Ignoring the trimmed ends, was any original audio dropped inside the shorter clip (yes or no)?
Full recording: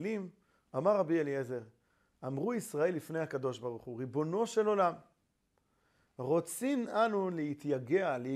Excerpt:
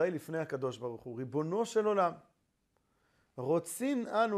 no